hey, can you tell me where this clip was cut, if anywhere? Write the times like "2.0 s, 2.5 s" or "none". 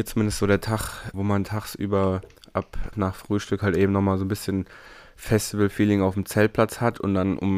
1.1 s, 2.9 s

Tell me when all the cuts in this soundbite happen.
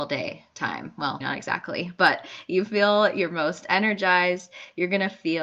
1.2 s

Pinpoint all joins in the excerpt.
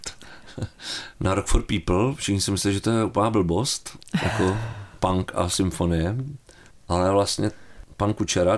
none

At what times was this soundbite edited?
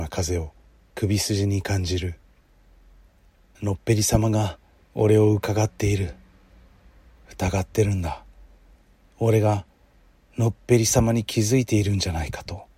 none

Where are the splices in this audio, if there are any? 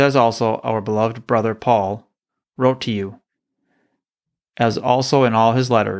2.4 s

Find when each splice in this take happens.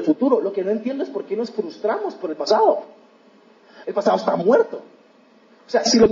3.8 s

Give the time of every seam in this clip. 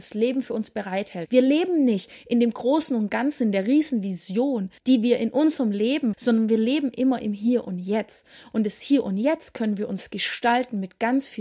1.3 s, 4.8 s, 6.1 s

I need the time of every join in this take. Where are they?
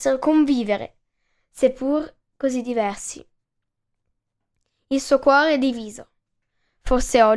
none

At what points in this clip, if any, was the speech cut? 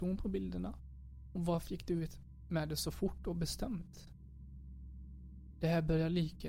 none

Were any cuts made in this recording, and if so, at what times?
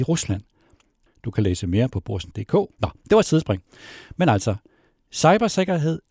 1.1 s, 2.7 s

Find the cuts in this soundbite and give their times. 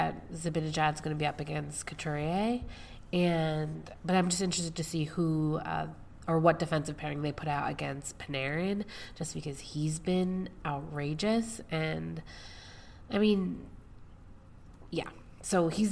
none

